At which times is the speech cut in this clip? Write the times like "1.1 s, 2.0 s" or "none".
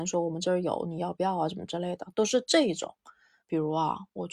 3.4 s